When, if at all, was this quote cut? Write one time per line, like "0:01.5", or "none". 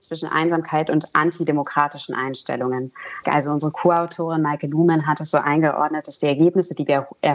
0:03.2